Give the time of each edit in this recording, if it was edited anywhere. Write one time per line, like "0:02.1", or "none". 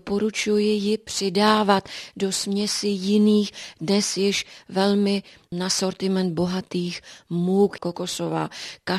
0:07.8